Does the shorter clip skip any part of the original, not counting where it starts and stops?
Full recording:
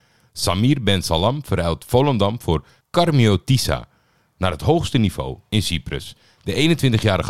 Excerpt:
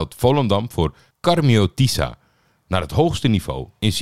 no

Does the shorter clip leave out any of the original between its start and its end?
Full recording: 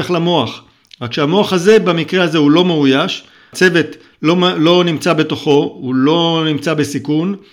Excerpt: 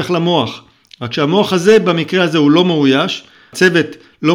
no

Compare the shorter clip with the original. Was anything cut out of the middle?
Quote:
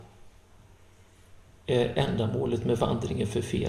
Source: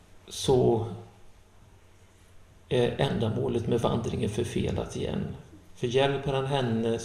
no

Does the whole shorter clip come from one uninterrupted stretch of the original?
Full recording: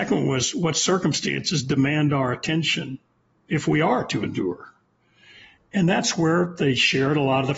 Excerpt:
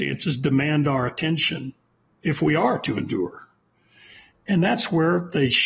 yes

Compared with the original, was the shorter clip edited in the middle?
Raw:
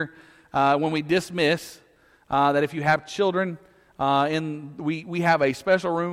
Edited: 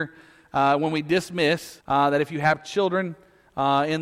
yes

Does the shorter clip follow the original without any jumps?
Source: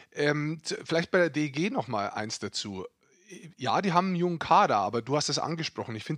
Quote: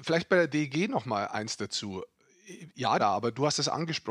no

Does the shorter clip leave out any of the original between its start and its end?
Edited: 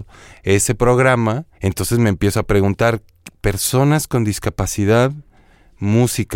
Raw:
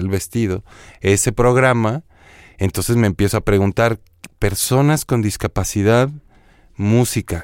yes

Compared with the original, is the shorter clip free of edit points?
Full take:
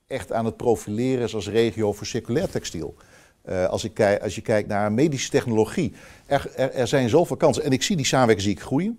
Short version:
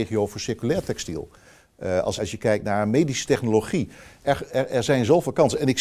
no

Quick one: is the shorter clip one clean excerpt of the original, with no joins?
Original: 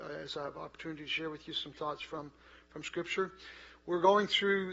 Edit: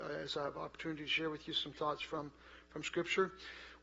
yes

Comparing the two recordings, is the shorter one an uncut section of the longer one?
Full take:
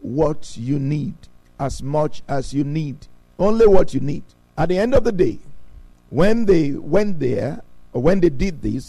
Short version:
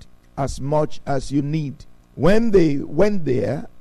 no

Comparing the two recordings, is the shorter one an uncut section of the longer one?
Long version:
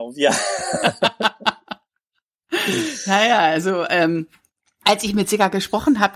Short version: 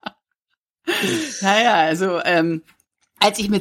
yes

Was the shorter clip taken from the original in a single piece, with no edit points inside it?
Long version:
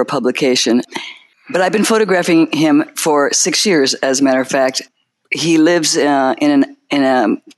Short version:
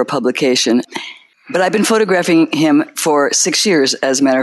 yes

